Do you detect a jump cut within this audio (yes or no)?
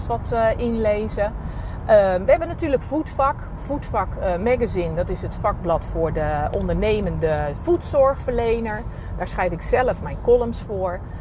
no